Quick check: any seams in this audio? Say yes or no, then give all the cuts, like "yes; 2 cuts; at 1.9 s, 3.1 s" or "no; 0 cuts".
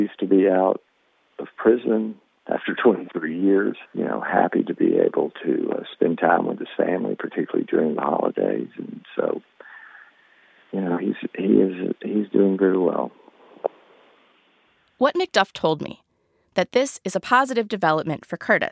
yes; 1 cut; at 3.9 s